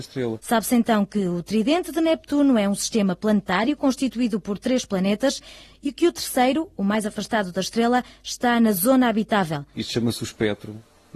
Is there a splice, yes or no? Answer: yes